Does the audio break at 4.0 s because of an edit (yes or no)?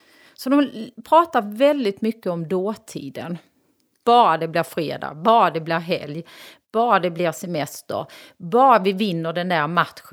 yes